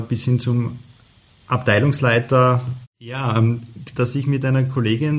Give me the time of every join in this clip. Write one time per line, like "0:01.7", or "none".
0:02.8
0:03.9

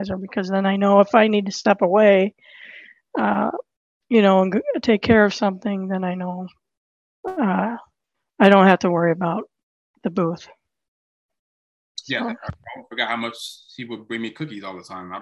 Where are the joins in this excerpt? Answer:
none

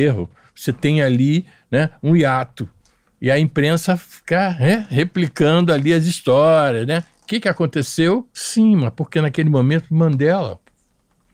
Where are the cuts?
0:08.3

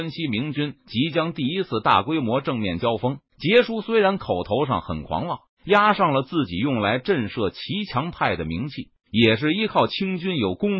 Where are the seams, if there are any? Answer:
0:03.3
0:05.5
0:09.0

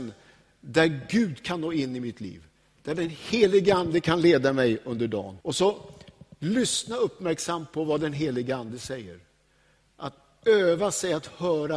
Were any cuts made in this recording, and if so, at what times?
0:05.4

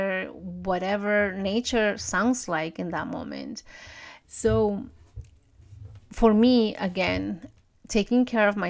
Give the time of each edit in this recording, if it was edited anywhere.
0:04.2

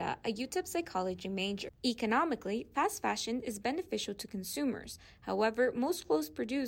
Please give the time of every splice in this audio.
0:01.7

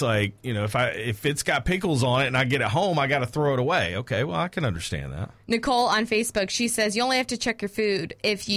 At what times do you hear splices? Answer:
none

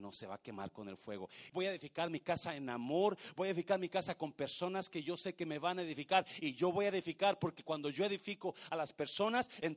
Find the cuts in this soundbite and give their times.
0:01.5

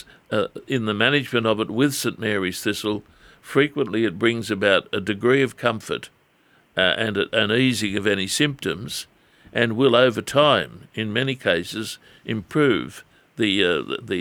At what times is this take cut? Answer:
none

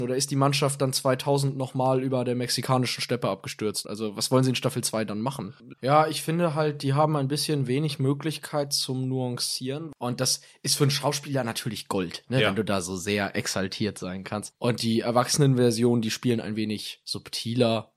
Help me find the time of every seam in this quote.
0:05.7
0:10.0

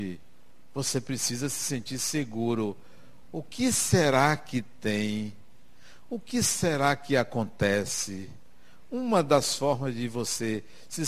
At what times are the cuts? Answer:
none

